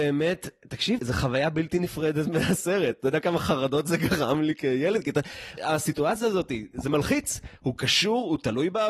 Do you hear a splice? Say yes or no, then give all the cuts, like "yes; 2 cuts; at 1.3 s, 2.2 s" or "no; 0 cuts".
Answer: yes; 2 cuts; at 1.0 s, 5.6 s